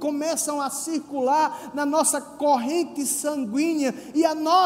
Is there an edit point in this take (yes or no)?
no